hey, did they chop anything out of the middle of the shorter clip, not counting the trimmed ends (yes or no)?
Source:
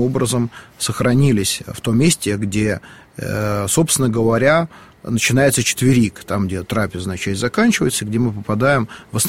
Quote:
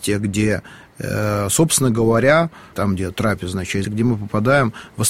yes